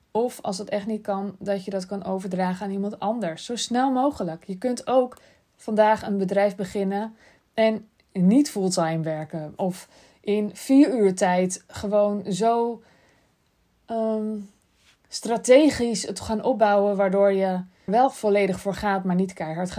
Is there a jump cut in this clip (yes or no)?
yes